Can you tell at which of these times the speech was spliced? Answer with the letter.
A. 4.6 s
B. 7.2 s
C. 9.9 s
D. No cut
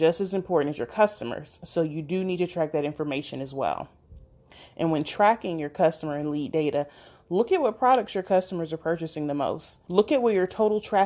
C